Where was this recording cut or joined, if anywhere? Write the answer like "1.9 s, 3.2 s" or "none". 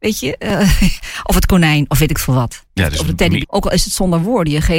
3.4 s